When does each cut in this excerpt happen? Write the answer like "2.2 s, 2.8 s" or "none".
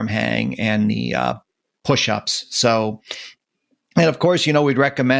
none